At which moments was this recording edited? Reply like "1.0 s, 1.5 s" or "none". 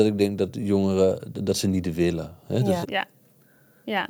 2.8 s